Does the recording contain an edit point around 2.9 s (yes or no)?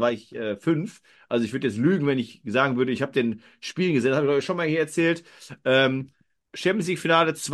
no